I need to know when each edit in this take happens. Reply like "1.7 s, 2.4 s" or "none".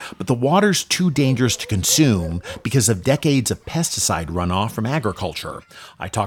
none